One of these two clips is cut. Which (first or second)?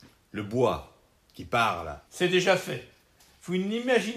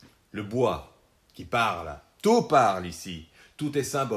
first